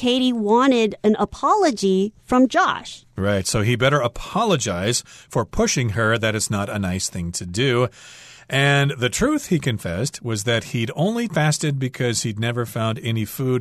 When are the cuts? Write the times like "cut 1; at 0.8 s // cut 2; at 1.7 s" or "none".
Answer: none